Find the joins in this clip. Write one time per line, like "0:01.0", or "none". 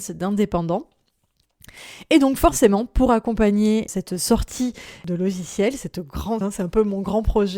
0:06.4